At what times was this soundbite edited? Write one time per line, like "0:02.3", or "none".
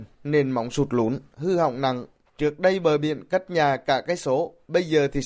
0:02.3